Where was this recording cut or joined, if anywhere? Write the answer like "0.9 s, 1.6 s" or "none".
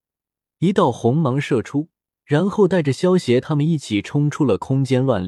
2.2 s